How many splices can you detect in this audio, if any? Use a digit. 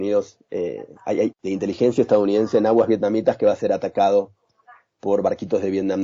1